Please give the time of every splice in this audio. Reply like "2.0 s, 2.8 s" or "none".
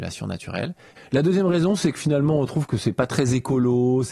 1.0 s